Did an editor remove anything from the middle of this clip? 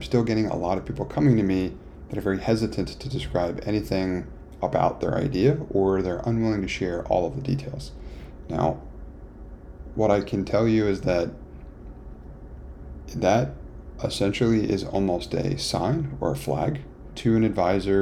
no; 0 cuts

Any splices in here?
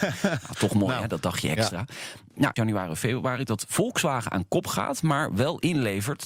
yes; 1 cut; at 2.6 s

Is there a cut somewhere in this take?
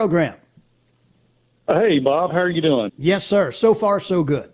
yes; 1 cut; at 2.9 s

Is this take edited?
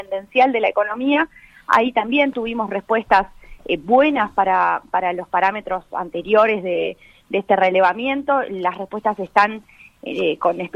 no; 0 cuts

